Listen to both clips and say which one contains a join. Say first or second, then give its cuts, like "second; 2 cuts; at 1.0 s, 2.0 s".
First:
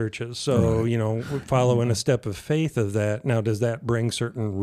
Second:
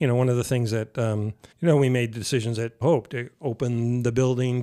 second; 2 cuts; at 1.5 s, 2.8 s